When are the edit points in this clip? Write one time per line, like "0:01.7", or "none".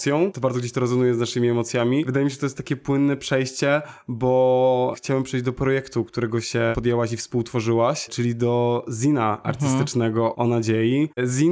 none